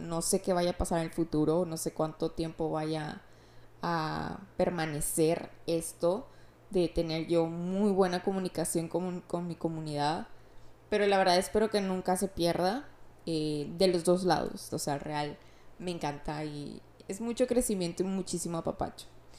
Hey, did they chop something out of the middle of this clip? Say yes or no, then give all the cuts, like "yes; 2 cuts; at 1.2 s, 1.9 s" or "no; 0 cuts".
yes; 1 cut; at 14.7 s